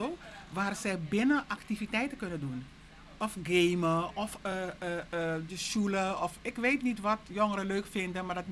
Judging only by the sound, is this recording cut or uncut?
uncut